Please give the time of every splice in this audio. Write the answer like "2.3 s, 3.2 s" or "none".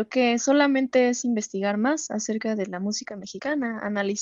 none